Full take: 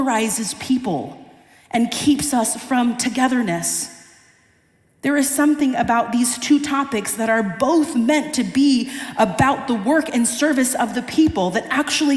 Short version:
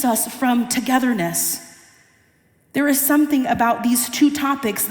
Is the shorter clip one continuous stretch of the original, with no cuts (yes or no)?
yes